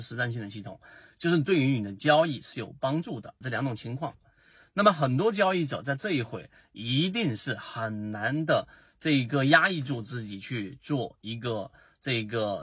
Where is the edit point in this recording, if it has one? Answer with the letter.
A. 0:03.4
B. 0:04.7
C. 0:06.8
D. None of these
A